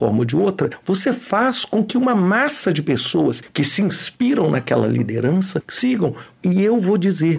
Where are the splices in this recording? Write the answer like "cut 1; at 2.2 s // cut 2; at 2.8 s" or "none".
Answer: cut 1; at 6.4 s